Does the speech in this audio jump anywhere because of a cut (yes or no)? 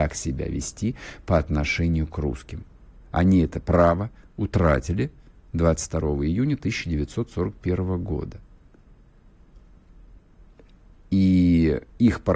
no